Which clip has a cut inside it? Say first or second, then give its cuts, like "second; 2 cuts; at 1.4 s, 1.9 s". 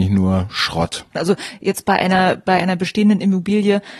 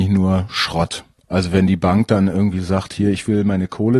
first; 1 cut; at 1.1 s